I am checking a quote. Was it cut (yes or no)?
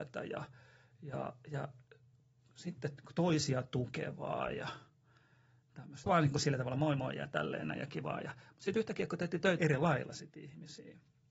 yes